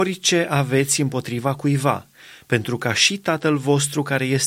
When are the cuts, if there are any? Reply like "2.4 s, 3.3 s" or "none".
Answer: none